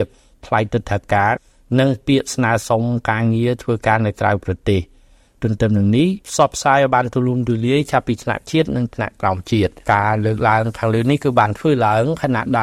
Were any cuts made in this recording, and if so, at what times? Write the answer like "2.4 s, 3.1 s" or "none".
6.2 s, 9.8 s